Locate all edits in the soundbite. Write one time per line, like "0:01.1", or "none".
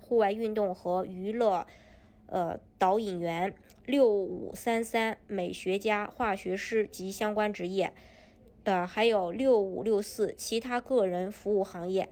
0:05.3